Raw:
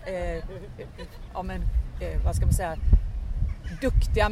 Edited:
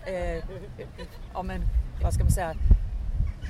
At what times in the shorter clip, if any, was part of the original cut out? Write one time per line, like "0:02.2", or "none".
0:02.0